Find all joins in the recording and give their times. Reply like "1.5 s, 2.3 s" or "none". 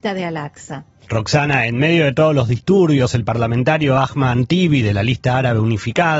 1.0 s